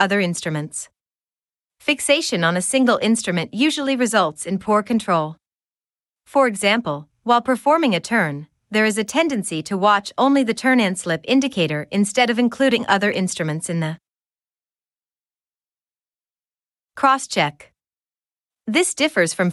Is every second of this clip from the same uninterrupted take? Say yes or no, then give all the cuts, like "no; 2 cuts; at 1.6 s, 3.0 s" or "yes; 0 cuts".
no; 1 cut; at 18.5 s